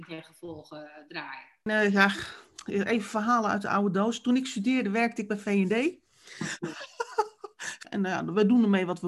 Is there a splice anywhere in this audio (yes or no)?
yes